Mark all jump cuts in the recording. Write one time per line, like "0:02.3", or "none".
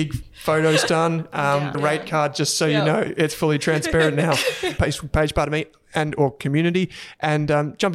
0:01.7
0:04.8